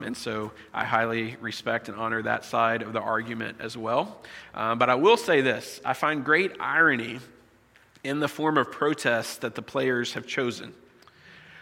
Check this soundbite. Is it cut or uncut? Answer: uncut